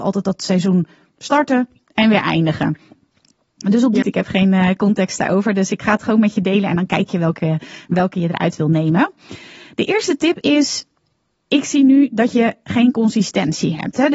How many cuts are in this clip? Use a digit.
1